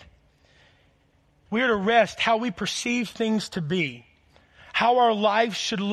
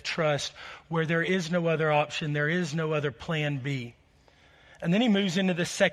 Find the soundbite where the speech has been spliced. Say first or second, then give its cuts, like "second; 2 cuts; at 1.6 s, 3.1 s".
first; 1 cut; at 1.5 s